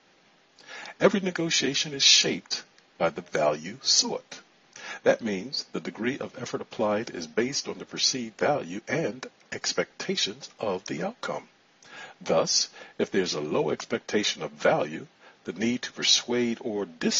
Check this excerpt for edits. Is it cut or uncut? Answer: uncut